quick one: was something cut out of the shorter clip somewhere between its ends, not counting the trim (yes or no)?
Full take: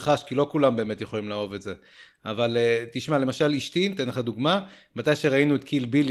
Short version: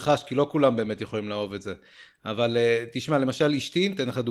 no